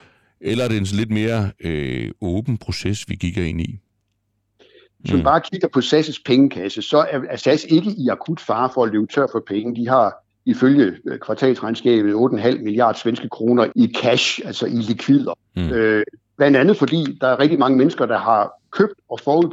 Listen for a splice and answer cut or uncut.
cut